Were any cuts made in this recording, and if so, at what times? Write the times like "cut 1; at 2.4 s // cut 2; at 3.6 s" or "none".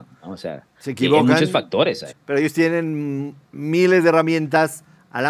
cut 1; at 2.1 s // cut 2; at 3.4 s